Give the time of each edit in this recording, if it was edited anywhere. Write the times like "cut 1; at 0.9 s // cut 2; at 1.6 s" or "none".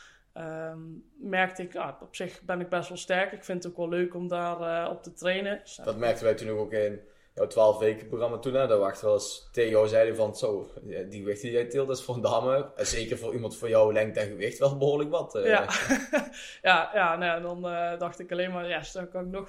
none

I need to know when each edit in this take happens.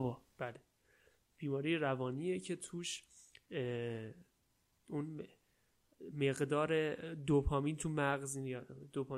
none

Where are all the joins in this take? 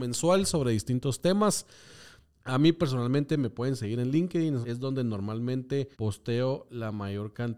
cut 1; at 2.3 s // cut 2; at 4.6 s // cut 3; at 5.9 s

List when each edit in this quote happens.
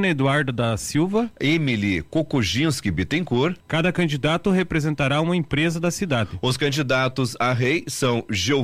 cut 1; at 3.6 s

